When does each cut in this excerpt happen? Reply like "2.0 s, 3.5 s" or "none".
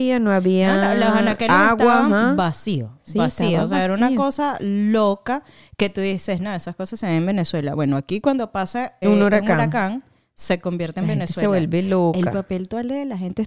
9.0 s